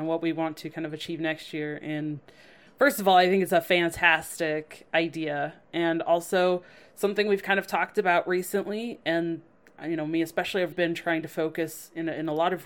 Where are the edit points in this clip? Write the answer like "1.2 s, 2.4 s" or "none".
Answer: 10.7 s